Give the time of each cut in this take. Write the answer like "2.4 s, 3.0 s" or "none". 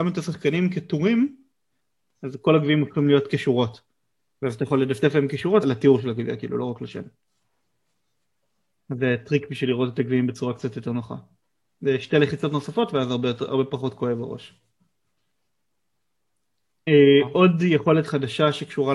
5.6 s